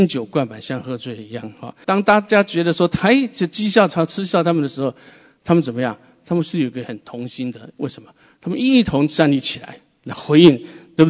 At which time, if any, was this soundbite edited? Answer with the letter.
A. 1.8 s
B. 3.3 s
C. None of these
A